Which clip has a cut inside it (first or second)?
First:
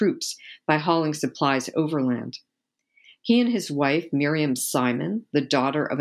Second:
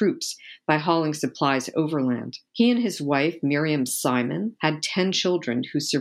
second